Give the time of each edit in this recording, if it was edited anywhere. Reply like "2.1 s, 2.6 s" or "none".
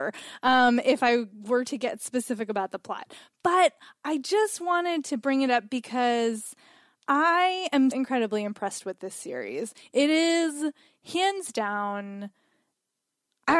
7.9 s